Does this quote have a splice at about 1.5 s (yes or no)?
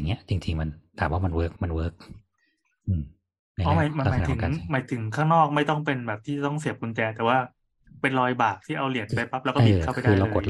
yes